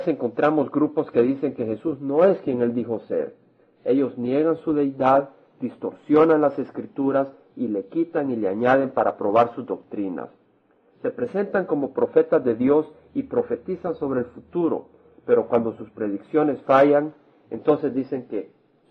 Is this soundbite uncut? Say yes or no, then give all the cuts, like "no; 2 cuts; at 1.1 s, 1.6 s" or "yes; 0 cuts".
yes; 0 cuts